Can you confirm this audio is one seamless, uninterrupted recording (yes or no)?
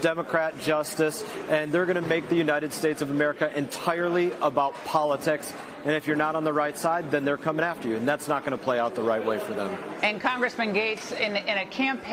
yes